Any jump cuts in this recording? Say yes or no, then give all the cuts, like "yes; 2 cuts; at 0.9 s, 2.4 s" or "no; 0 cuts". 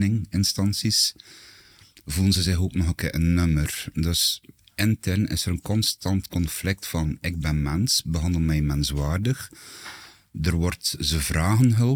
no; 0 cuts